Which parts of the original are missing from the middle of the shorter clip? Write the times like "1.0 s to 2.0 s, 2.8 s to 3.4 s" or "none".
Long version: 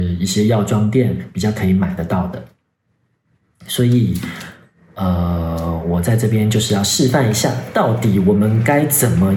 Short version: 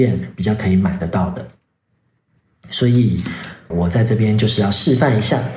4.7 s to 5.8 s